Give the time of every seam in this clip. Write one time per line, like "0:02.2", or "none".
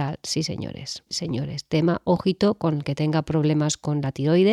0:01.1